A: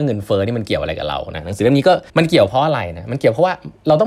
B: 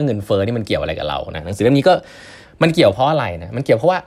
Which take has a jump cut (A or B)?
A